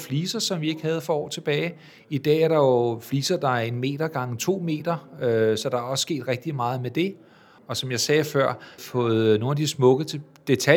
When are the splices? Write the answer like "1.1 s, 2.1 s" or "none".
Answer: 7.6 s, 8.8 s